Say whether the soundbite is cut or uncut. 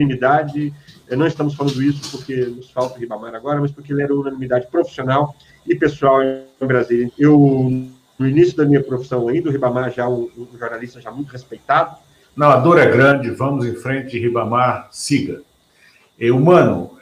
cut